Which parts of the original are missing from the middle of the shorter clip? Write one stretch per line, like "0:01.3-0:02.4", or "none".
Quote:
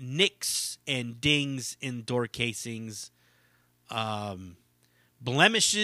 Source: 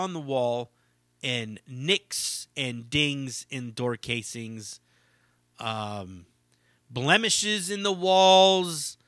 none